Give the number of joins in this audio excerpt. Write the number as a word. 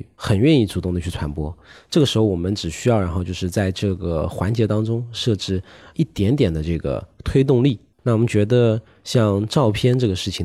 one